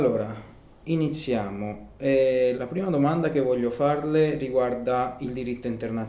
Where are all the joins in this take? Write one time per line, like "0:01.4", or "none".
0:02.5